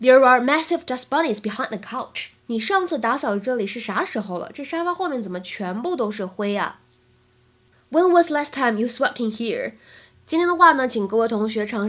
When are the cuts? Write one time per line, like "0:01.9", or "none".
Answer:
0:02.4
0:10.1